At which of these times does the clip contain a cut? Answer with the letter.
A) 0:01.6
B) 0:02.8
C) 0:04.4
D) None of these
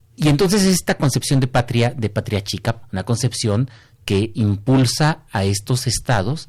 B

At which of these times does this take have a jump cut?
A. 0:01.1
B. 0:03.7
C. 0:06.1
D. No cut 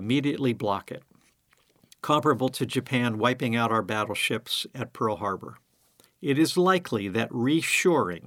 C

